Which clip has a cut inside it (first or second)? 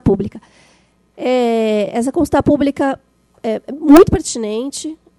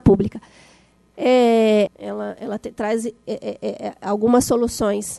second